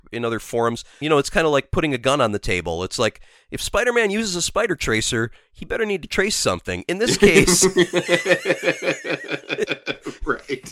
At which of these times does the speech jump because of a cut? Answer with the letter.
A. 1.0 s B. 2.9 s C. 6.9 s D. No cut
A